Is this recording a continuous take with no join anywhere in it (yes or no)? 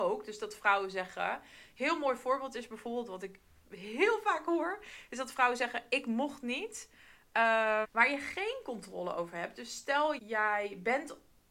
no